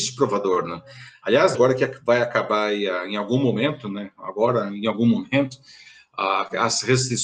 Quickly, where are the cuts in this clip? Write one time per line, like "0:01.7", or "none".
0:01.5